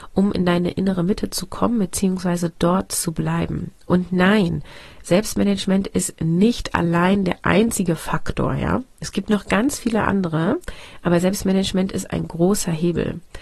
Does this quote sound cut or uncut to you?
uncut